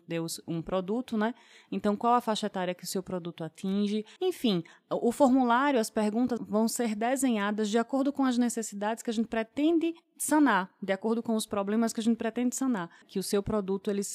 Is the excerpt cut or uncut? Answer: cut